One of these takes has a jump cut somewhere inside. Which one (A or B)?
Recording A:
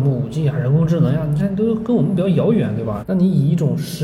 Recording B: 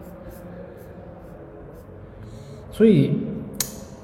A